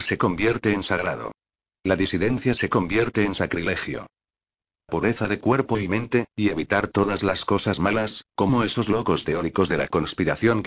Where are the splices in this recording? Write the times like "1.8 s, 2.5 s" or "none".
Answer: 4.8 s